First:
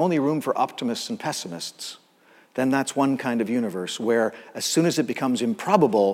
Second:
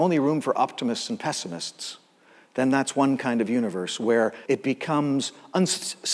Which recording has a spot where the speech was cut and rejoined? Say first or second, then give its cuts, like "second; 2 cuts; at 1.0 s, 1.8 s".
second; 1 cut; at 4.5 s